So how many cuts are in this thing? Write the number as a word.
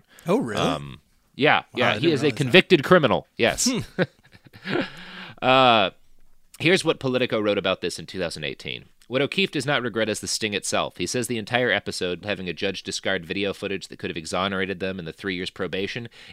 one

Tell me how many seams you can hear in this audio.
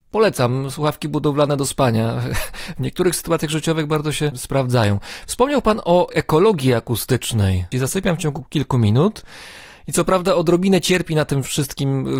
one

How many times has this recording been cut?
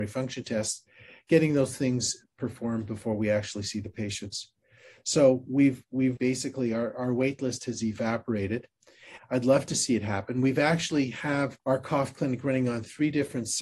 three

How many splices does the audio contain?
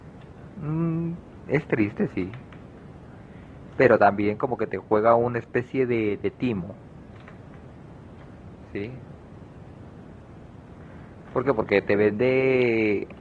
zero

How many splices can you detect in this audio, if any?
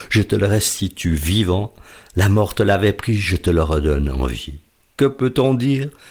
one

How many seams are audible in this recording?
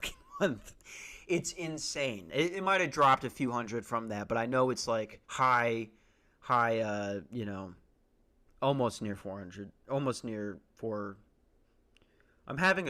one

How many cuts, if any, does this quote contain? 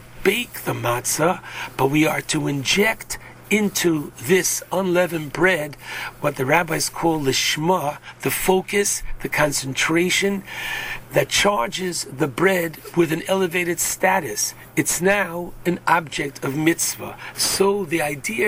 one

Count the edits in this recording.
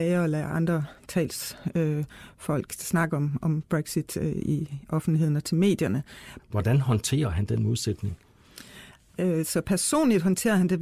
one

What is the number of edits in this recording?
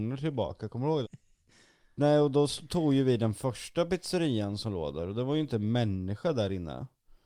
one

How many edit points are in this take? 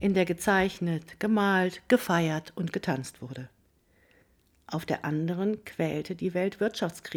zero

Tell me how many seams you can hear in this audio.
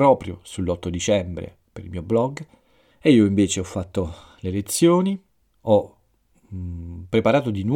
two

